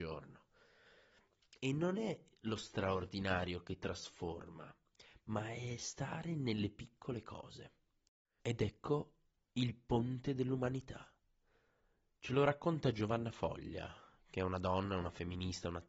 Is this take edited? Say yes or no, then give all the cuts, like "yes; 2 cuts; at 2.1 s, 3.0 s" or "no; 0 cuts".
yes; 1 cut; at 8.4 s